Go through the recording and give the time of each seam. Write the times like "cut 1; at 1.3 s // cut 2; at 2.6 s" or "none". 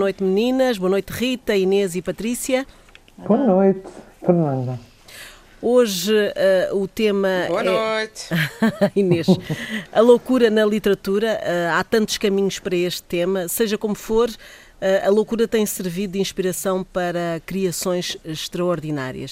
none

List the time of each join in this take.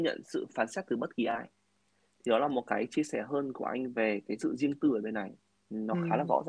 none

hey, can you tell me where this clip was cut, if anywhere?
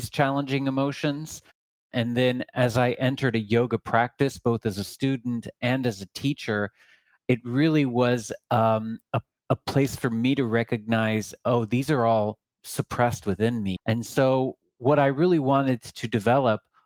cut 1; at 13.8 s

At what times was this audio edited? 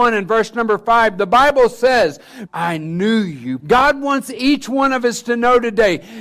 cut 1; at 2.5 s // cut 2; at 3.6 s

